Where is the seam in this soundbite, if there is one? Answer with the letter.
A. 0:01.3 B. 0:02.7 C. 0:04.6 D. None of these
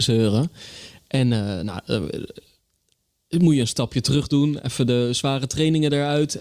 D